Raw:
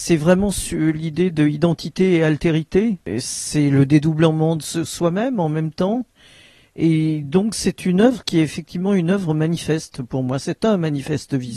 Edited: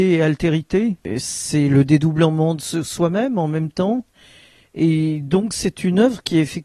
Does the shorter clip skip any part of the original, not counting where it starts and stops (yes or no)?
no